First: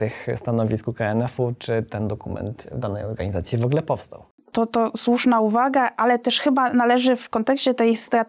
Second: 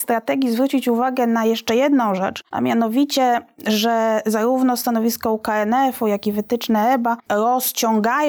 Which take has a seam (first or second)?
second